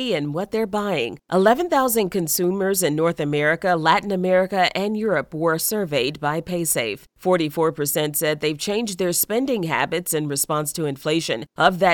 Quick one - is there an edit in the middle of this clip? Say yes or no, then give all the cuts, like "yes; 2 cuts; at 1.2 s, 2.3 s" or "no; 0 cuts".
no; 0 cuts